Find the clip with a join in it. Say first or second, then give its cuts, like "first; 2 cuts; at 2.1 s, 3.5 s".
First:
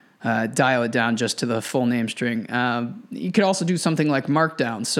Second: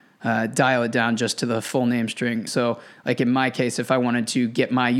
second; 1 cut; at 2.5 s